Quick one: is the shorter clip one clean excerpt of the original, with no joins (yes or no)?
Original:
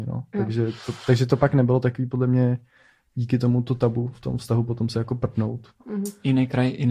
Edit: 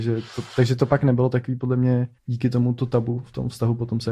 no